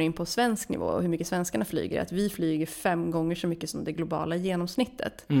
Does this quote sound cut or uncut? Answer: uncut